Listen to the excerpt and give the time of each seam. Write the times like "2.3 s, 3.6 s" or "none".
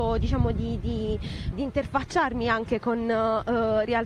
1.5 s

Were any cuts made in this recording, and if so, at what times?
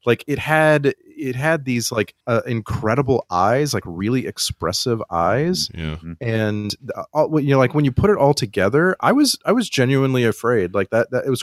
2.2 s

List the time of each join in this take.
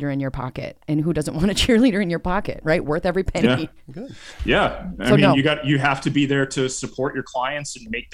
none

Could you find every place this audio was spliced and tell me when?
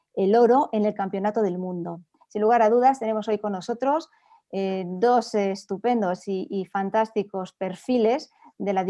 2.2 s

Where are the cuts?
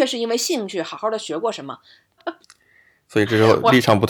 2.2 s

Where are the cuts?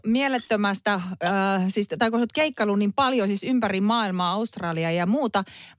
none

